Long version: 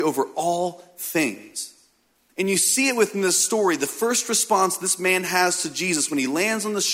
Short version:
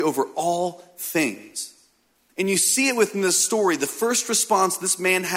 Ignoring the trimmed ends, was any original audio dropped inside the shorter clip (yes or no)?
no